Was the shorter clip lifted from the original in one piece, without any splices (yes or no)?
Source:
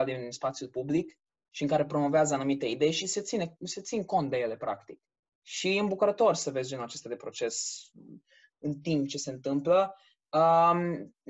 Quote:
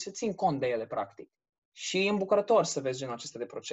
yes